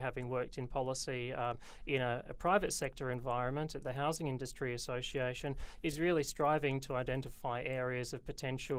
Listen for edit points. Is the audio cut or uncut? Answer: uncut